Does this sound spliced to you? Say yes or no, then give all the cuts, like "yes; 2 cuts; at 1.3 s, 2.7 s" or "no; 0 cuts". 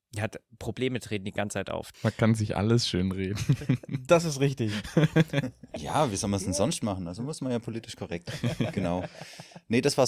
yes; 2 cuts; at 1.9 s, 5.7 s